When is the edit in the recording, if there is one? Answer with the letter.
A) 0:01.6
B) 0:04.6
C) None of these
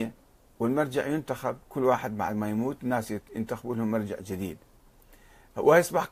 A